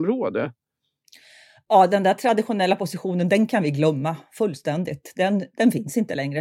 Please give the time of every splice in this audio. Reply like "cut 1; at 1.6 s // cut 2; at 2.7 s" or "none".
none